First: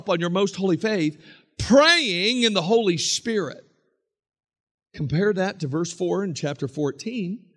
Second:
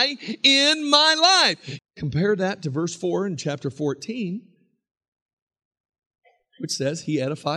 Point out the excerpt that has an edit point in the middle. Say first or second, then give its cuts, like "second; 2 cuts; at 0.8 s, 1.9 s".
second; 1 cut; at 1.8 s